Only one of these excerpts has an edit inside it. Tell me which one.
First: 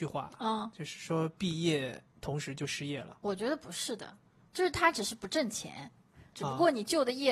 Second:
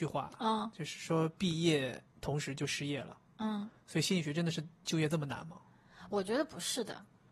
first; 2 cuts; at 3.2 s, 6.3 s

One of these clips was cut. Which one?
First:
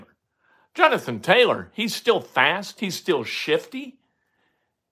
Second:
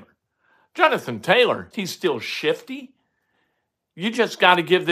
second; 1 cut; at 1.7 s

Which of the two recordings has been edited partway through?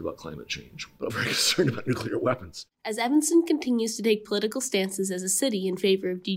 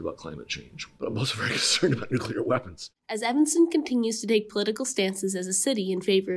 first; 1 cut; at 1.1 s

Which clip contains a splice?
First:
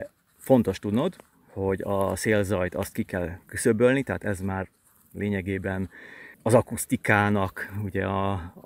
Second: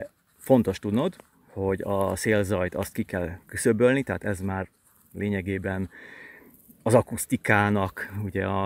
first; 1 cut; at 6.3 s

